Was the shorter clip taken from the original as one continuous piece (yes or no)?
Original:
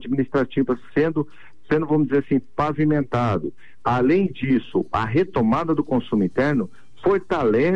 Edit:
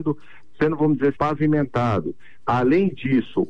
no